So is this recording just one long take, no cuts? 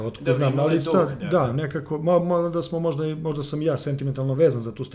no; 1 cut; at 2.2 s

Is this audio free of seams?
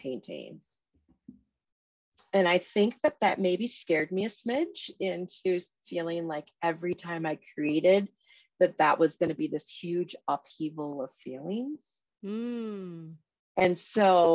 yes; 0 cuts

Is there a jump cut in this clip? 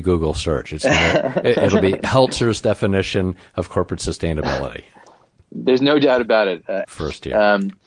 yes; 1 cut; at 6.8 s

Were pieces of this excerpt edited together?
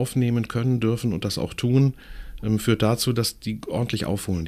no; 0 cuts

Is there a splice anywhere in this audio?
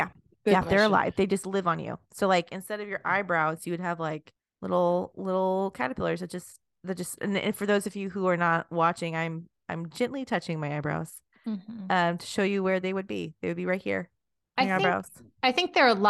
no; 0 cuts

